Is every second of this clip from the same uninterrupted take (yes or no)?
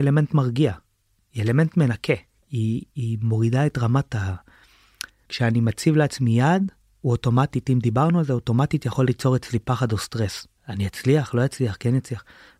yes